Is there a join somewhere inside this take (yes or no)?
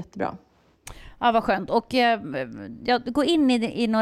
no